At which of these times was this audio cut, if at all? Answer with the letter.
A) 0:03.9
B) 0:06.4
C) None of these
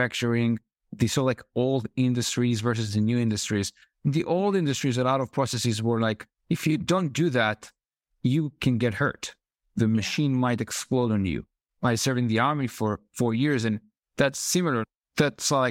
B